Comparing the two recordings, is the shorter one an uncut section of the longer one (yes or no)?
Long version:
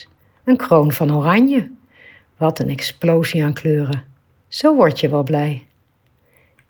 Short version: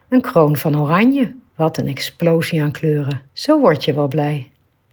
no